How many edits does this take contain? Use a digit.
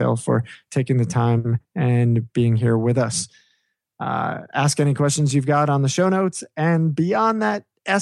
0